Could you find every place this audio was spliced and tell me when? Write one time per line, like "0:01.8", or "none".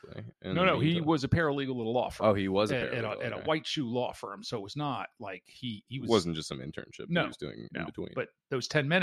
0:08.1